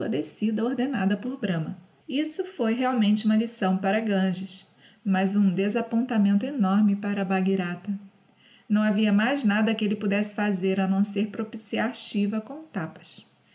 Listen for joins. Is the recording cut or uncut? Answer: cut